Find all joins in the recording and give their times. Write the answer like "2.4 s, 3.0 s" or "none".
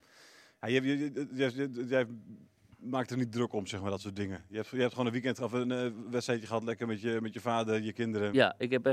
none